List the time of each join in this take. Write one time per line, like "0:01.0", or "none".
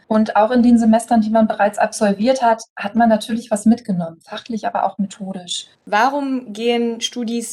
0:05.8